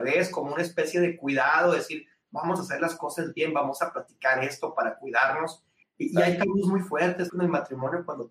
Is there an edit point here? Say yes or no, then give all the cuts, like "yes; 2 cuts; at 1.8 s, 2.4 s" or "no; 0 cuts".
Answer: yes; 2 cuts; at 5.8 s, 7.3 s